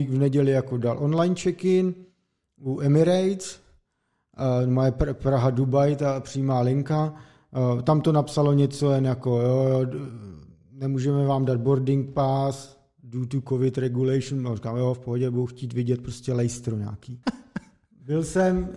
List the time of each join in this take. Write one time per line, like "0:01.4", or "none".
0:17.2

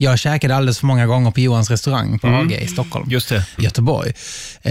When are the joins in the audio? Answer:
0:03.6

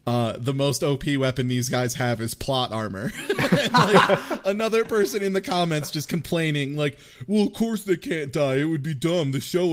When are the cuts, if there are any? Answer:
none

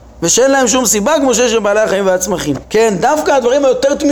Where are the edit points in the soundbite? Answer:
0:02.6

